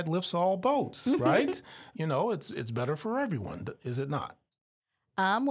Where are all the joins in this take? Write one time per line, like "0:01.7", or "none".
0:01.9